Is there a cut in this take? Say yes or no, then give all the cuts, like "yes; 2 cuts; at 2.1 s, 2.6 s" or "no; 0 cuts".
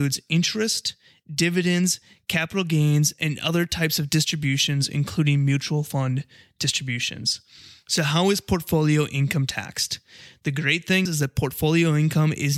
yes; 1 cut; at 11.1 s